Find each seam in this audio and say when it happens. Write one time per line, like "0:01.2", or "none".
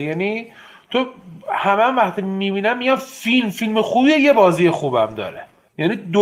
none